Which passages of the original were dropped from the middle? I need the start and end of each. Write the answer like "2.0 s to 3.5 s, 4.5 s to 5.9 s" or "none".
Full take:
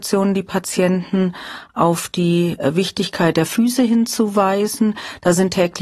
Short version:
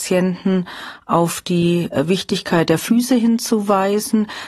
none